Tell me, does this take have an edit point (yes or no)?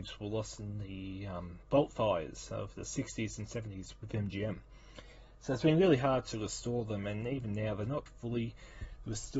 yes